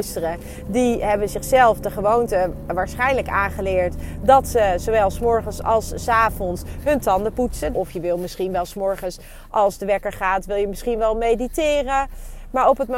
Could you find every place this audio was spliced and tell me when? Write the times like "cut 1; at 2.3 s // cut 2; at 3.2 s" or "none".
cut 1; at 7.7 s